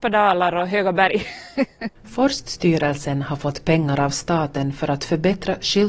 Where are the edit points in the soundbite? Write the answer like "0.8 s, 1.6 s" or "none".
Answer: 2.0 s